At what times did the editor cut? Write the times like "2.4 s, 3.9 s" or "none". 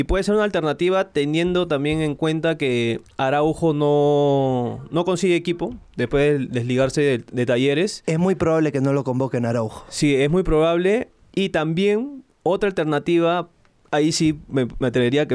none